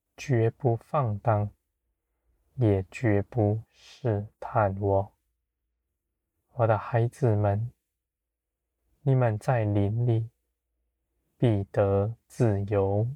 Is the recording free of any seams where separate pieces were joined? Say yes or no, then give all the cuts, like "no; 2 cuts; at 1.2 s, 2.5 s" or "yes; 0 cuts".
yes; 0 cuts